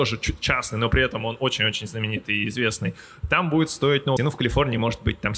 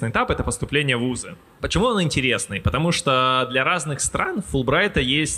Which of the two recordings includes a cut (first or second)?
first